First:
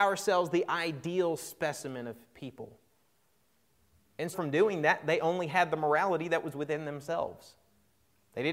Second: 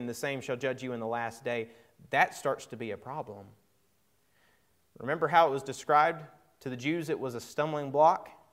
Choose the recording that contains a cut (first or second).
first